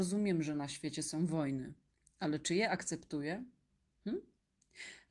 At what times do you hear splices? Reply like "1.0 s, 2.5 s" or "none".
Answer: none